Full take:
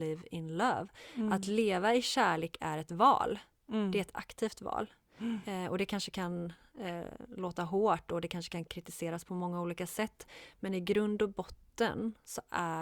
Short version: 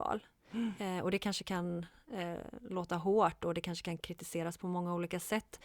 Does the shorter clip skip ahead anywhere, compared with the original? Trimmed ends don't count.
no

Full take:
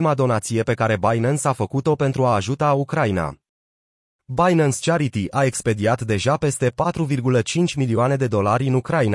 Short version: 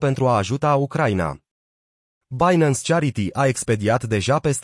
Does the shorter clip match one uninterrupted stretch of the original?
yes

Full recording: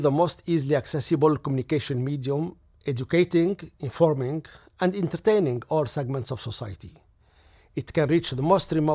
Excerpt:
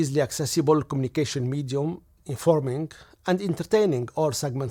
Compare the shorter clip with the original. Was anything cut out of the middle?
yes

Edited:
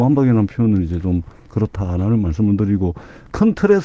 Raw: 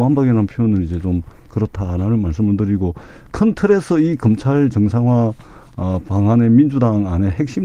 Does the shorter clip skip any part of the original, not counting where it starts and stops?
no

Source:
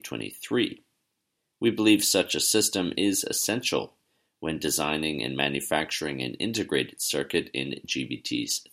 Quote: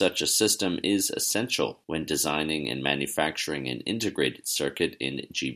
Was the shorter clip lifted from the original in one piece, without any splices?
no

